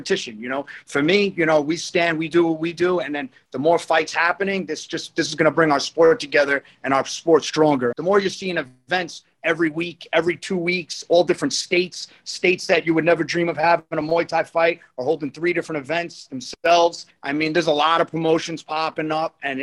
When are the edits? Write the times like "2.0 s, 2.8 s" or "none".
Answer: 7.9 s, 17.1 s